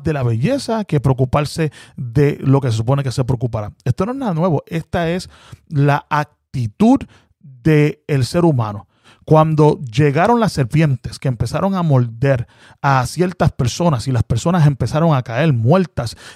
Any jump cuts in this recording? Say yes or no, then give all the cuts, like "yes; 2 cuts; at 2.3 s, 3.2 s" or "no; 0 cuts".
no; 0 cuts